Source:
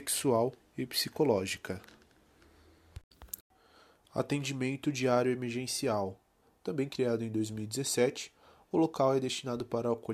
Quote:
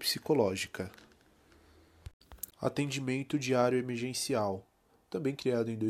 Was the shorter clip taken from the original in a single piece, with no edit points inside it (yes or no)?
no